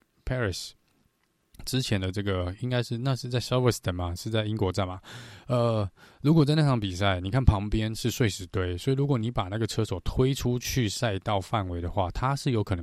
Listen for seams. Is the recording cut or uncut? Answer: uncut